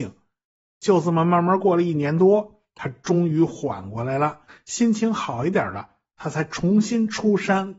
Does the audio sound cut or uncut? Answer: uncut